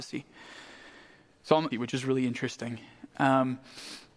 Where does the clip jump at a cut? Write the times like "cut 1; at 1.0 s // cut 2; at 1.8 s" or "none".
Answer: cut 1; at 1.7 s